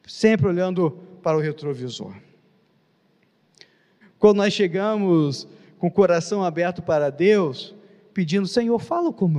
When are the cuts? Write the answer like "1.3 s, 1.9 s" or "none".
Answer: 4.0 s